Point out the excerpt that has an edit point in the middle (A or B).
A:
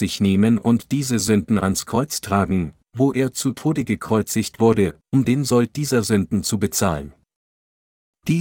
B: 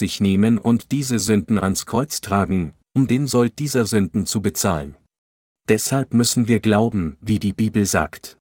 B